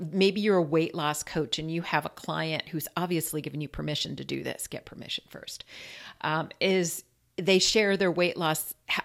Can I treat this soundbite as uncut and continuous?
yes; 0 cuts

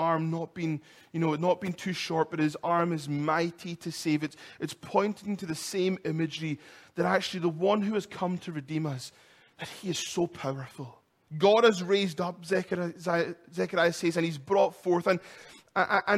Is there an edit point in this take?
yes; 1 cut; at 11.3 s

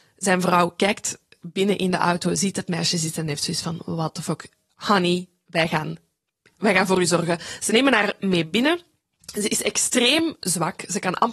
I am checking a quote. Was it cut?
no; 0 cuts

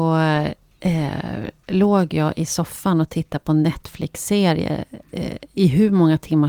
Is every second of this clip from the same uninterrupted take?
yes; 0 cuts

